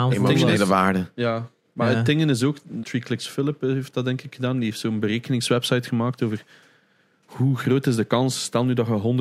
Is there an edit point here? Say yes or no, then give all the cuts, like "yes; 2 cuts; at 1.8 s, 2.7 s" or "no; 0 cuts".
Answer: yes; 1 cut; at 2.8 s